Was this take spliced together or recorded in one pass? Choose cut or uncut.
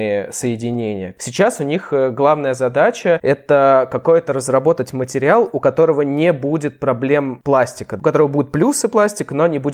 cut